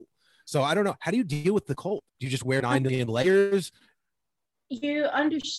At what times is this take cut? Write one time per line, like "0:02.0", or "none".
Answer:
0:02.1